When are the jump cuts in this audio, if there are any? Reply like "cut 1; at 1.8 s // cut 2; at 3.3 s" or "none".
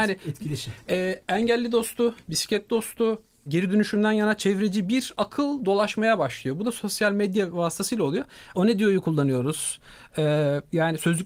cut 1; at 3.5 s // cut 2; at 8.5 s